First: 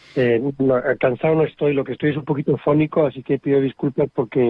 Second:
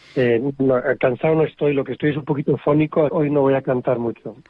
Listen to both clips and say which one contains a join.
second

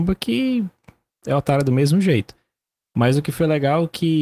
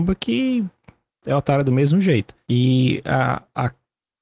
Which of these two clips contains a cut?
second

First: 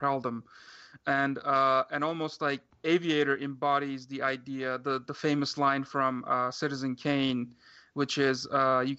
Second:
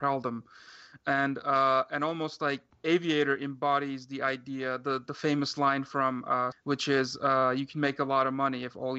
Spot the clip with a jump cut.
second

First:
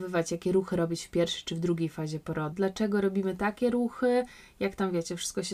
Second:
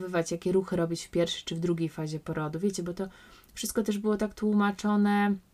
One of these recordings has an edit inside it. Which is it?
first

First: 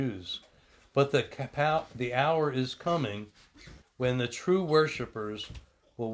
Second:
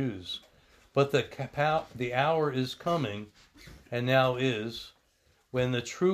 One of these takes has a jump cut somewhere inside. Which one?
first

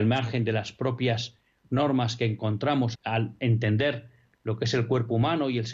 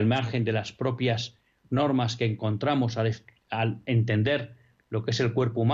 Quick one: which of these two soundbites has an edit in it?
first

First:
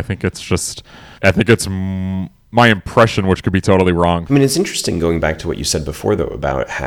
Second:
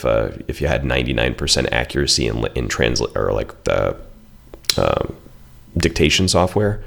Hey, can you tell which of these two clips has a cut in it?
first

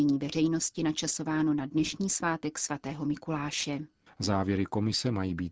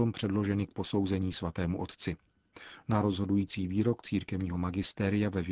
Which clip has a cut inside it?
first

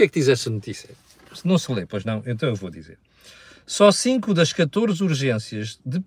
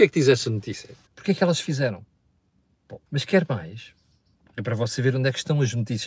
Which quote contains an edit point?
second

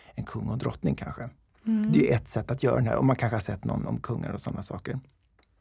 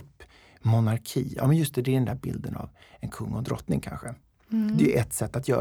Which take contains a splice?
first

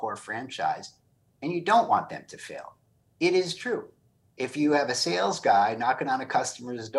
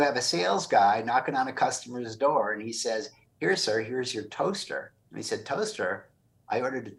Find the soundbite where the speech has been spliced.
second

